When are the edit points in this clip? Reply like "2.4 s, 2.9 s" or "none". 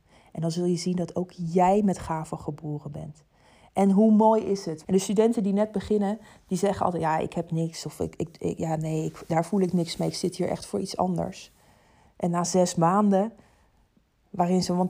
4.8 s

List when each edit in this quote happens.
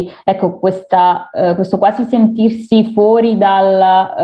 none

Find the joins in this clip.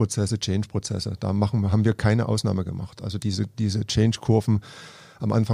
none

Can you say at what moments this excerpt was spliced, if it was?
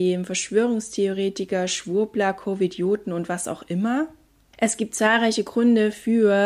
none

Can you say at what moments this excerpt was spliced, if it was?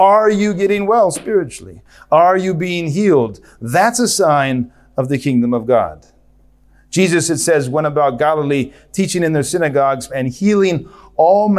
10.1 s

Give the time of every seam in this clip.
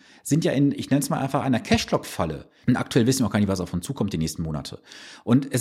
2.6 s

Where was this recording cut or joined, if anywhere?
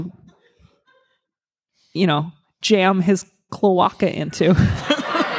none

